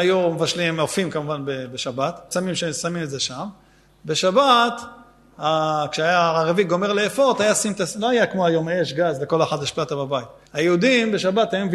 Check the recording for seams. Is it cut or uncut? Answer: cut